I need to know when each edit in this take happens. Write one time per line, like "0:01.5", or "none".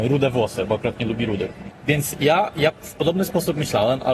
0:01.7